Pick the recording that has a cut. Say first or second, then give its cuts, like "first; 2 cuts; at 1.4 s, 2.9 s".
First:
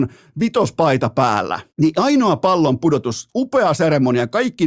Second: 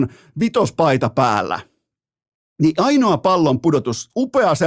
first; 1 cut; at 1.7 s